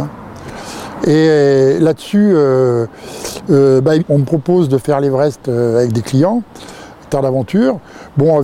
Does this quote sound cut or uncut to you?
cut